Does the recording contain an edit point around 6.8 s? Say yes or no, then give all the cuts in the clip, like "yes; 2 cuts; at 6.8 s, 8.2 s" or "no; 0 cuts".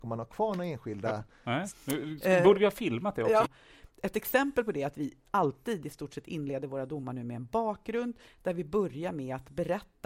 no; 2 cuts; at 1.7 s, 3.4 s